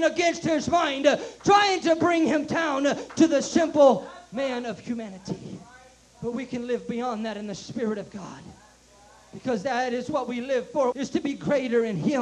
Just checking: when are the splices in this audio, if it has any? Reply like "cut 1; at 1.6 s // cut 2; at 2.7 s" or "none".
cut 1; at 10.9 s